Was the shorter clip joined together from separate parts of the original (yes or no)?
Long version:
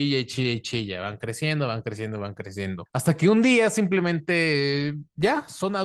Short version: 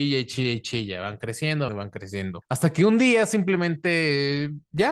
yes